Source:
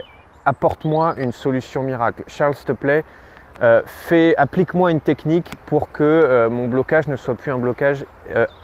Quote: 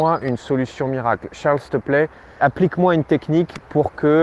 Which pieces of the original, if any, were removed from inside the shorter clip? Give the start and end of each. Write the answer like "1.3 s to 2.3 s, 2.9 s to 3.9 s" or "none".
3.3 s to 4.4 s